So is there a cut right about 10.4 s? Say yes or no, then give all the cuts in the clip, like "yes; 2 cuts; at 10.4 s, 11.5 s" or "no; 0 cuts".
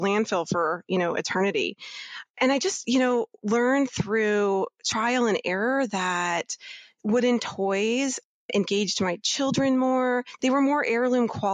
yes; 1 cut; at 10.4 s